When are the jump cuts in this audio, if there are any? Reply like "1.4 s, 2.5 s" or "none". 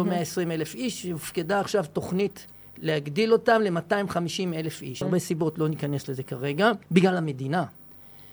5.0 s, 6.8 s